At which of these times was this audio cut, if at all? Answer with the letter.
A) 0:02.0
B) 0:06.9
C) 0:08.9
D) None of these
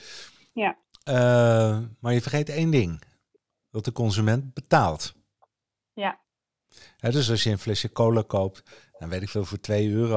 D